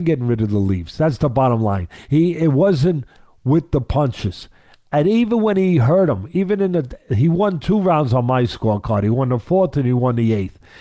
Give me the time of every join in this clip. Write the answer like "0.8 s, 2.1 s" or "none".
none